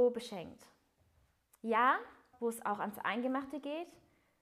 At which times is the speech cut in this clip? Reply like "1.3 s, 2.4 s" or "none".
2.3 s